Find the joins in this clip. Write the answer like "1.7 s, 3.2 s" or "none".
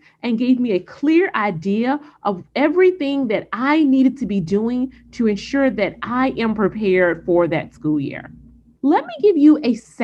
8.8 s